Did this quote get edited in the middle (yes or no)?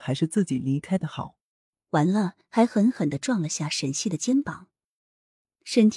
yes